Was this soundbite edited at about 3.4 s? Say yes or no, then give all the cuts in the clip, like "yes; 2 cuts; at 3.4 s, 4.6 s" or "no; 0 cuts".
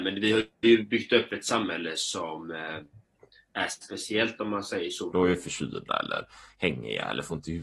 no; 1 cut; at 5.1 s